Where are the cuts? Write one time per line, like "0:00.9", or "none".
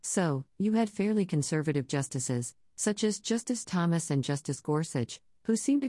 none